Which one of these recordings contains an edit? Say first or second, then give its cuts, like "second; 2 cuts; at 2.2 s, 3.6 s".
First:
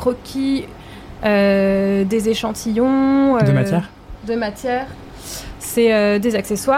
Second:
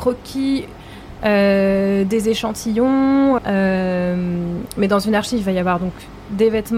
second; 1 cut; at 3.4 s